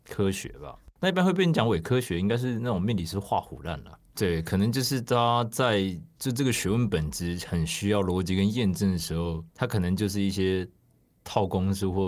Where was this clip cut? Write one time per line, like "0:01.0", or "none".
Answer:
0:04.1
0:09.5